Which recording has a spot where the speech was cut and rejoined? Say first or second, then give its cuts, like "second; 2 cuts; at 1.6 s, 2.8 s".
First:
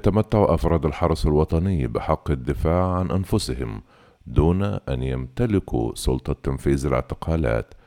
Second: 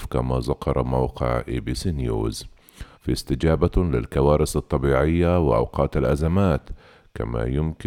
second; 1 cut; at 2.9 s